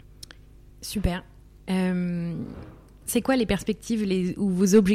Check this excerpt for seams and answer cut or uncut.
uncut